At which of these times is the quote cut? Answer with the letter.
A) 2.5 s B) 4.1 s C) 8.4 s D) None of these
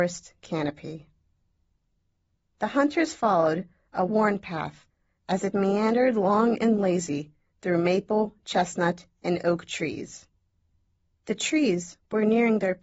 B